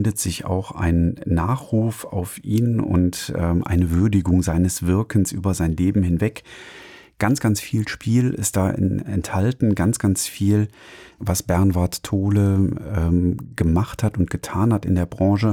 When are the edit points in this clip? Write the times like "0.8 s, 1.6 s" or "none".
11.2 s